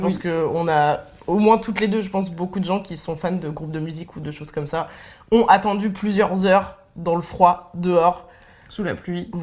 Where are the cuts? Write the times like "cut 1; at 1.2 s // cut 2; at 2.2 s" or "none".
none